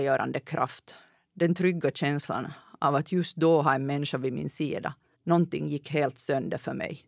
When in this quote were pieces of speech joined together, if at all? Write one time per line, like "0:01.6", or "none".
0:05.1